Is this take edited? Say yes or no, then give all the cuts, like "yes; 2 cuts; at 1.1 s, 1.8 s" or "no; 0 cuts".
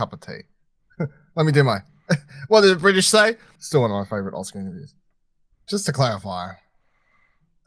yes; 2 cuts; at 3.6 s, 5.5 s